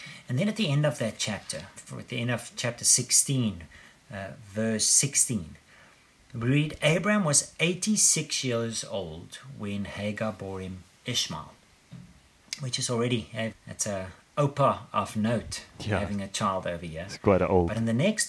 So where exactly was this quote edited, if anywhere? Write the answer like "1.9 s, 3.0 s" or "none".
1.8 s, 13.5 s